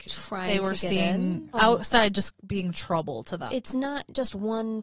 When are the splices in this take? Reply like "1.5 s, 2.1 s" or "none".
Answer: 1.5 s, 3.5 s